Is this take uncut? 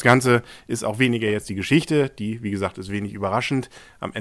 yes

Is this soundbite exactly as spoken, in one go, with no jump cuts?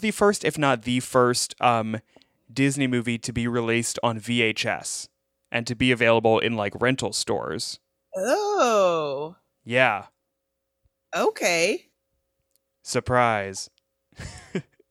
yes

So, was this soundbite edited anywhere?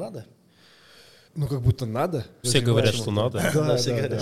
yes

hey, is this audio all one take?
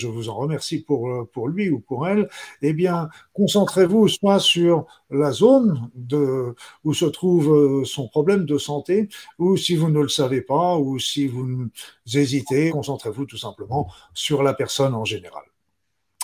no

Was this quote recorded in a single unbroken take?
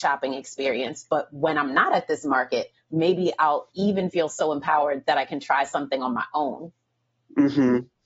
yes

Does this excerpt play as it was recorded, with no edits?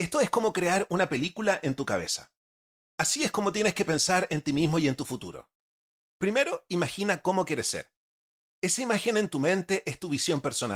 yes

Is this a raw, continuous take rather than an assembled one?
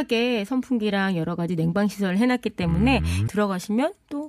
no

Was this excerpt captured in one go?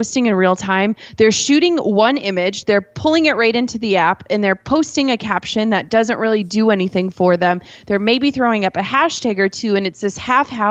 yes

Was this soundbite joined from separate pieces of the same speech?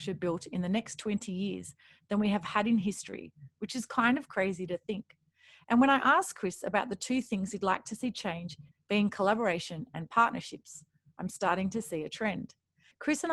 yes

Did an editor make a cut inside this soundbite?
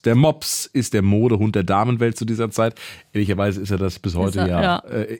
no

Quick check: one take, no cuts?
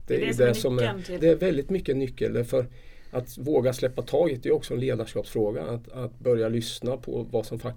no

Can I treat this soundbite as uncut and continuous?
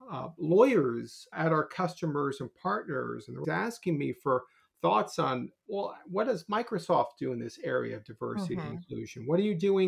no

